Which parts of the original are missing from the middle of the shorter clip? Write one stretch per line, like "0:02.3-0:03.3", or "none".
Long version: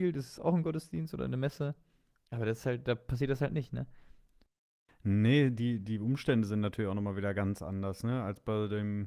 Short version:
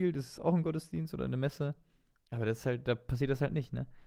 none